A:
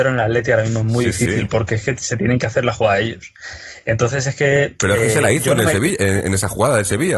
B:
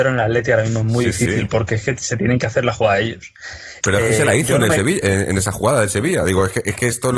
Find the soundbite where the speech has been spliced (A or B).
B